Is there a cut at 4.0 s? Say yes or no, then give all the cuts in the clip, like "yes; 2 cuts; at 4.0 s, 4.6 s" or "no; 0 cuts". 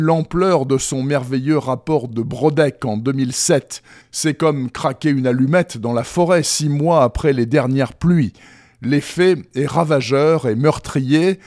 yes; 1 cut; at 4.0 s